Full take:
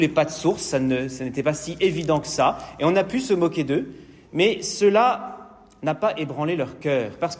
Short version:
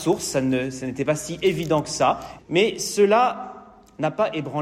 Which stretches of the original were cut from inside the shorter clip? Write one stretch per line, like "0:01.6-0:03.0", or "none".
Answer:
0:02.8-0:04.2

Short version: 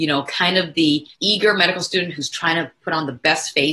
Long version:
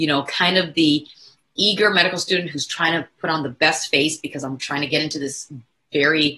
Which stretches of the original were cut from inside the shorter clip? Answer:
0:01.1-0:01.5

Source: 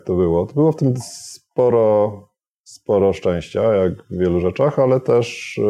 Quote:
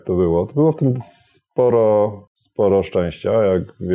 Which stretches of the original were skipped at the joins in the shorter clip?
0:02.3-0:02.6

